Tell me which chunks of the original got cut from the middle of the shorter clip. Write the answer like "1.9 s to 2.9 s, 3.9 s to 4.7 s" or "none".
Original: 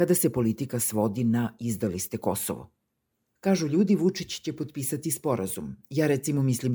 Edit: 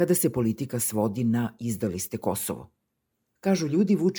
none